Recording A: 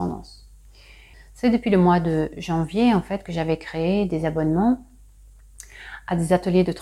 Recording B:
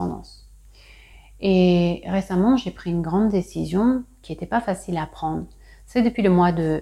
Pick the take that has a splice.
A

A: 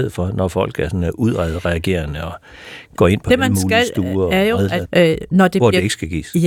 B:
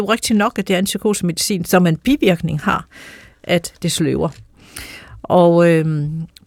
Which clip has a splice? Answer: A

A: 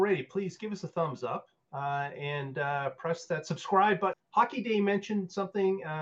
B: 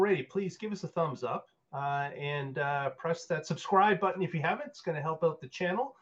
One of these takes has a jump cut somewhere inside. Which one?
A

